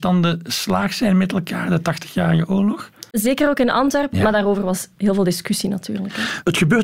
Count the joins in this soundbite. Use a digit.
2